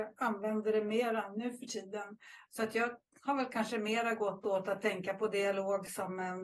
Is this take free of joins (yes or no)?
no